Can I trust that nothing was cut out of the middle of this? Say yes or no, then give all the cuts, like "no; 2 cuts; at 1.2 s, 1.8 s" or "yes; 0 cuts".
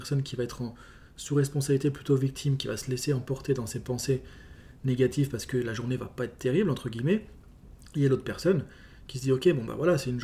yes; 0 cuts